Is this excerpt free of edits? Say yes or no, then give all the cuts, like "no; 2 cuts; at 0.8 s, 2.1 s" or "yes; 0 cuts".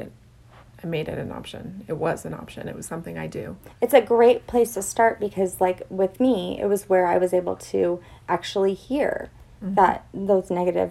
yes; 0 cuts